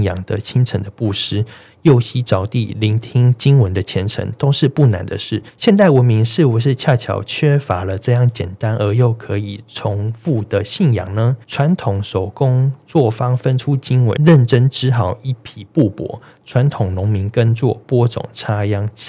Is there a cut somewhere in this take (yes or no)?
yes